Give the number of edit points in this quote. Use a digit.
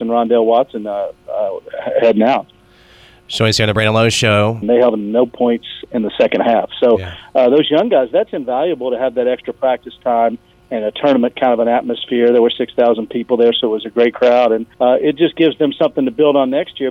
2